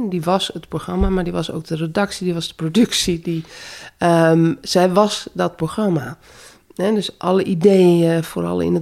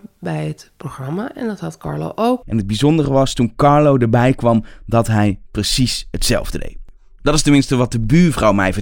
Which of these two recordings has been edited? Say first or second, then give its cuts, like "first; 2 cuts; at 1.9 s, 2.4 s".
second; 1 cut; at 2.4 s